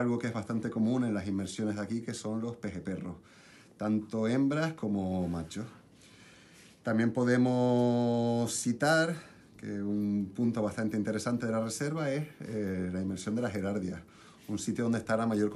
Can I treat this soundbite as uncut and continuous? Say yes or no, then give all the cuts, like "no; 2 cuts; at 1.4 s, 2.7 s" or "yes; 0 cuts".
yes; 0 cuts